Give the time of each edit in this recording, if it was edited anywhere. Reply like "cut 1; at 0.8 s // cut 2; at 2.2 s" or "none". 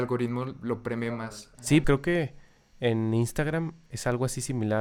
cut 1; at 1.8 s